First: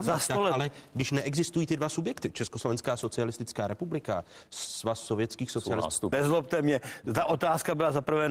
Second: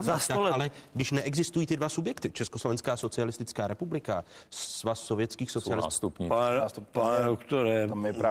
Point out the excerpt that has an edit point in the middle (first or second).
first